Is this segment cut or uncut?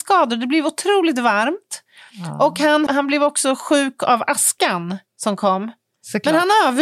cut